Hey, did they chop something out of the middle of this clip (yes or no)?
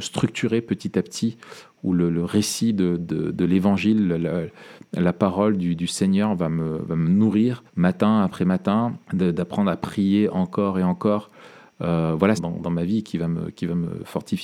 yes